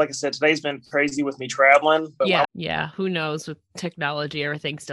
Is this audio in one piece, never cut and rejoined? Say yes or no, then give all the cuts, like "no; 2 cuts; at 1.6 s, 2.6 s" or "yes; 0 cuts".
no; 1 cut; at 2.4 s